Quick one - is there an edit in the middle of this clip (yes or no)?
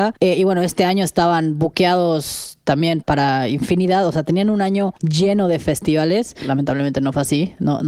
no